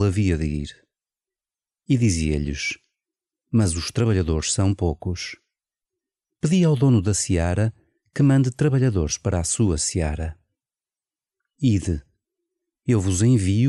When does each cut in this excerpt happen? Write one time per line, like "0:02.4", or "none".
0:03.3